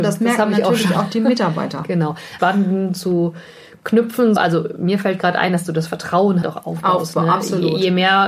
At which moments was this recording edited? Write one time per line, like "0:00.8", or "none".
0:02.4
0:04.4
0:06.4